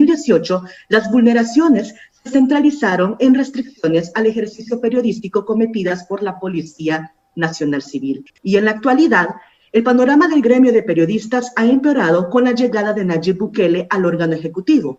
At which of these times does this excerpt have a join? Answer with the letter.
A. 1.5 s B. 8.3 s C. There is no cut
C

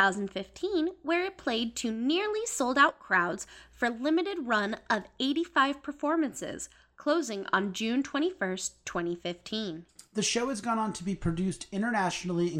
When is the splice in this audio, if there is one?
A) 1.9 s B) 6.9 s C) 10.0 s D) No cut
D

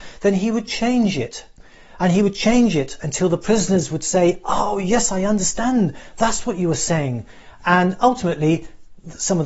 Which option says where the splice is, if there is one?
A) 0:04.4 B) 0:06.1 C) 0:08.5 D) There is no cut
D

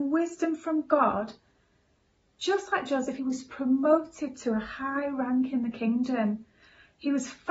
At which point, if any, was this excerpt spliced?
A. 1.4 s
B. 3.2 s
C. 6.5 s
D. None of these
B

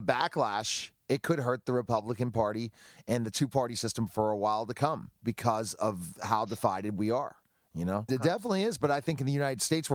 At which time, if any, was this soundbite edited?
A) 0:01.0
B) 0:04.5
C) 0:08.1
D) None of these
C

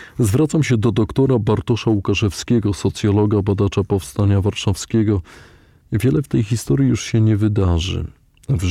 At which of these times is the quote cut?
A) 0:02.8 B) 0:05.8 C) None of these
B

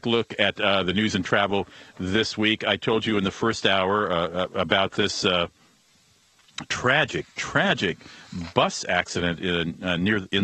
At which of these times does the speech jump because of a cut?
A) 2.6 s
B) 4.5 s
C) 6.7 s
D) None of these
D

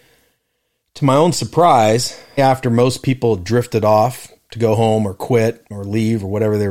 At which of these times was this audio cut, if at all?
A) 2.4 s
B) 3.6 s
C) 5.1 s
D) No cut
A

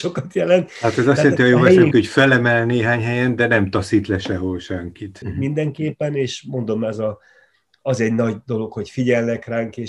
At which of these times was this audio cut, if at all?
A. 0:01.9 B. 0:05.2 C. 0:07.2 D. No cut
B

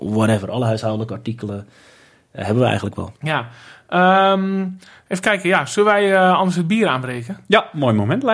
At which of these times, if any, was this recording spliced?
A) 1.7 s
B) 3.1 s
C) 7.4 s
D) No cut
B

